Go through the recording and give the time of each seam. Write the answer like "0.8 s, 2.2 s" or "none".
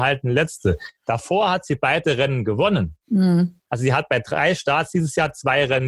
none